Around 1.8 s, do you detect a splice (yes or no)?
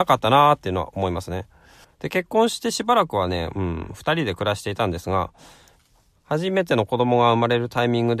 yes